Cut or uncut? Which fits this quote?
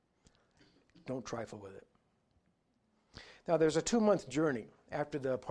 uncut